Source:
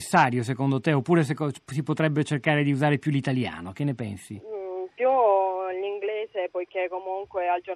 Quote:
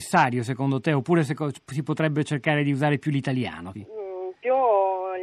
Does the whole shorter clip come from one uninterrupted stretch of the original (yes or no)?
no